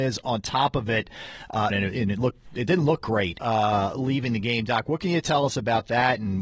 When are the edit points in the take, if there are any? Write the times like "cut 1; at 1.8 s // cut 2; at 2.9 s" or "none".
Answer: cut 1; at 1.7 s // cut 2; at 3.4 s